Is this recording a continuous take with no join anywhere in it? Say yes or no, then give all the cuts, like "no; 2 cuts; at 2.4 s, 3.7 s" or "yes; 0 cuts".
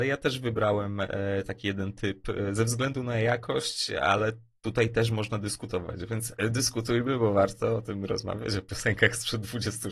yes; 0 cuts